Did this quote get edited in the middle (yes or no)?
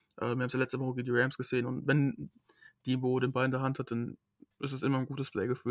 no